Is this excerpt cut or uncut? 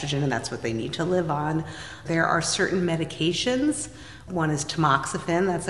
cut